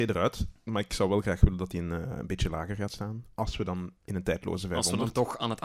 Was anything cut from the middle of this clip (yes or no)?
no